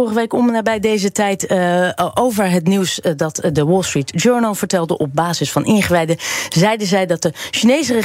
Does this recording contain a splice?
no; 0 cuts

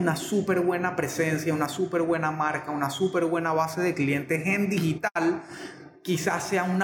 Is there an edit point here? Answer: no; 0 cuts

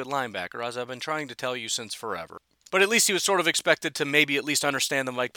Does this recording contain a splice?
no; 0 cuts

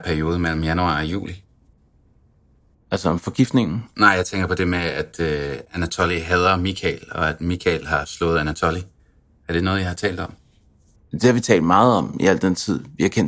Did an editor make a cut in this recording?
no; 0 cuts

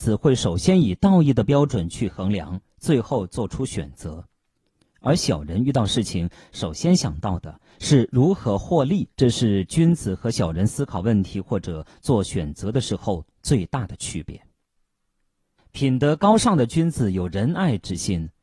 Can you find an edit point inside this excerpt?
yes; 2 cuts; at 9.1 s, 15.6 s

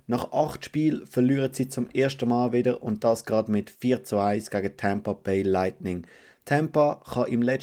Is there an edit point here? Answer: no; 0 cuts

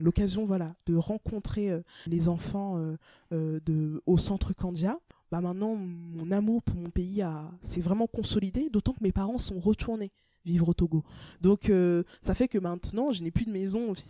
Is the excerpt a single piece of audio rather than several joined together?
no; 1 cut; at 2.1 s

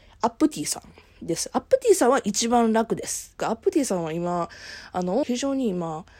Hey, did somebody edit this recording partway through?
yes; 2 cuts; at 3.4 s, 5.2 s

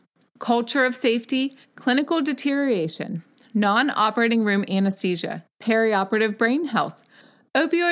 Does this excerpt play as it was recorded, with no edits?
no; 2 cuts; at 1.6 s, 5.5 s

